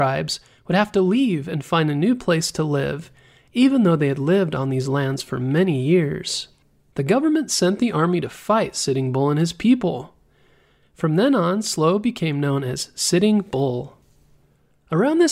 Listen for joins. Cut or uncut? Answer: cut